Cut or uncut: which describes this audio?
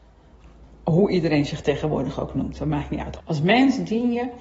cut